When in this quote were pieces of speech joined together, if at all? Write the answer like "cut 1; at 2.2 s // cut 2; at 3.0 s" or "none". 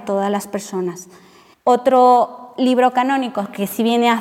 cut 1; at 1.5 s